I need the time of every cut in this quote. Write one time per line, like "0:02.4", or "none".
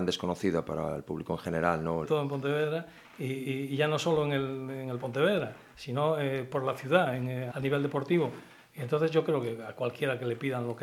0:02.0
0:07.5